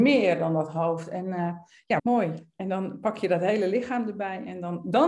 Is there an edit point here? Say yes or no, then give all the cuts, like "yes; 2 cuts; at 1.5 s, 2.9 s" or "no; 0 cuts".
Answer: yes; 1 cut; at 2.0 s